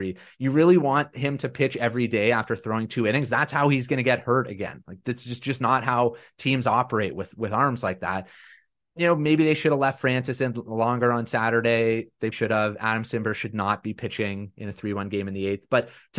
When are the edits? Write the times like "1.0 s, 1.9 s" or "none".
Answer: 12.3 s